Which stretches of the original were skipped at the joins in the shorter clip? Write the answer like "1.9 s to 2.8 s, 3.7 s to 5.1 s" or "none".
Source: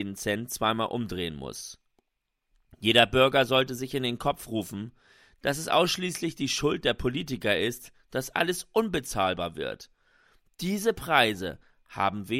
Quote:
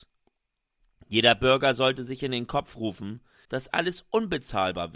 5.2 s to 8.1 s